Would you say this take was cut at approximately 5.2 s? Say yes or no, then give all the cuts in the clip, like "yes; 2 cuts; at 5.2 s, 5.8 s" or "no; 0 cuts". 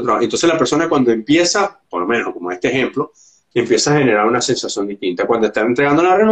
no; 1 cut; at 3.5 s